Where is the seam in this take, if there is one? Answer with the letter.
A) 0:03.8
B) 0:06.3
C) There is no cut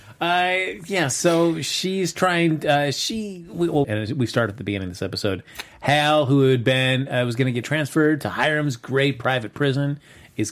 A